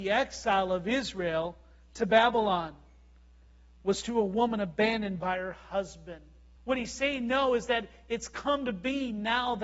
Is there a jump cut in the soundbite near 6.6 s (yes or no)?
yes